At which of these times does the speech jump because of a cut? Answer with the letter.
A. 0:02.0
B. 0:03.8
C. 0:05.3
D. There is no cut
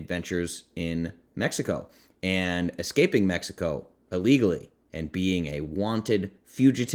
D